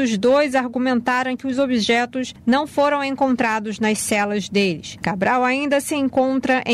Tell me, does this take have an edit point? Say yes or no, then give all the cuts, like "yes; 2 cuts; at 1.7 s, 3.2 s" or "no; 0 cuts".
yes; 1 cut; at 5.0 s